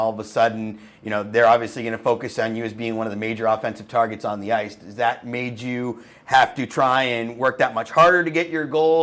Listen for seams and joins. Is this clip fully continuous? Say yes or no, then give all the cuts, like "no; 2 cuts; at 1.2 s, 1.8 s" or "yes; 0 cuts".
yes; 0 cuts